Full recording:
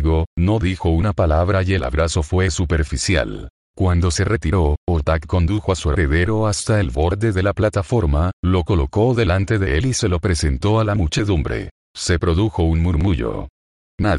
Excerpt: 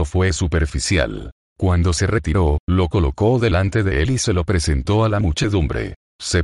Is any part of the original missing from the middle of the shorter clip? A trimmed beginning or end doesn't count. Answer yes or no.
yes